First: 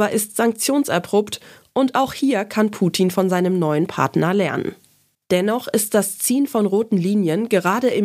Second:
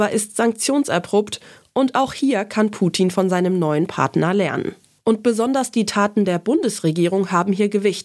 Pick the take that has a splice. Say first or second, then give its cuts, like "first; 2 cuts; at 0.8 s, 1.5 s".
second; 1 cut; at 5.0 s